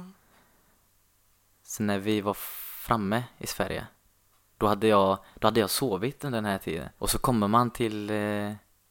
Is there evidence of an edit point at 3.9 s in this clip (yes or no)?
no